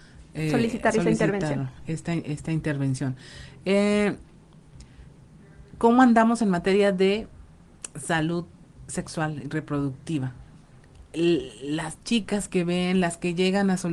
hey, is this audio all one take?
yes; 0 cuts

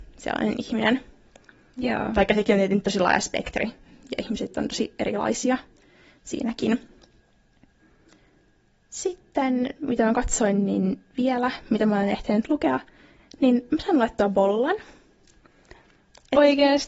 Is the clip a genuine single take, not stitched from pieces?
yes; 0 cuts

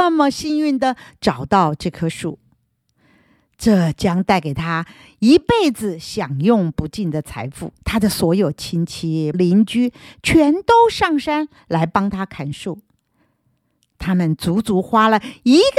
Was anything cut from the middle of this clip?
yes; 2 cuts; at 7.8 s, 9.3 s

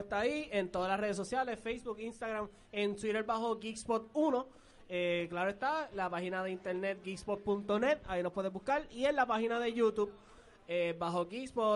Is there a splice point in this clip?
no; 0 cuts

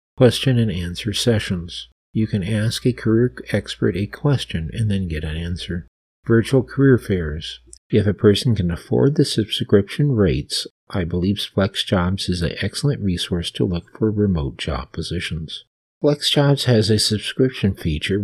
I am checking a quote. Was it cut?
yes; 2 cuts; at 7.8 s, 15.8 s

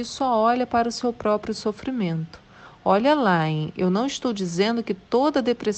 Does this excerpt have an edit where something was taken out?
no; 0 cuts

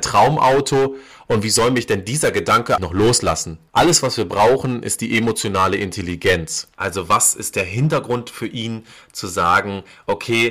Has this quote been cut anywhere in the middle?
yes; 2 cuts; at 2.8 s, 6.7 s

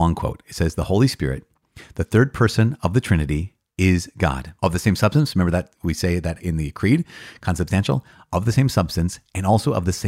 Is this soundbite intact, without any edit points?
no; 1 cut; at 4.6 s

